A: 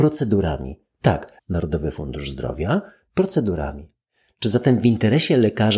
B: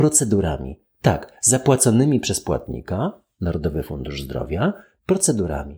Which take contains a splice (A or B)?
A